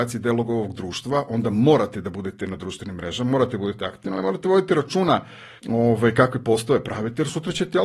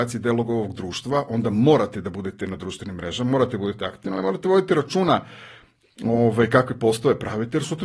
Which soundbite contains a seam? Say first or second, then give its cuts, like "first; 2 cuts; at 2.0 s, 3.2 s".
first; 1 cut; at 5.6 s